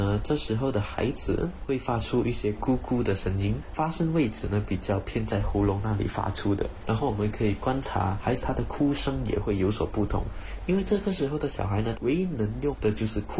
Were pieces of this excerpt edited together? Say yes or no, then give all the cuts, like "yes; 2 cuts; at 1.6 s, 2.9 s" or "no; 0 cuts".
yes; 2 cuts; at 8.4 s, 11.9 s